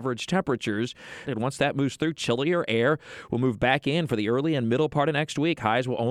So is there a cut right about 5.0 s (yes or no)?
no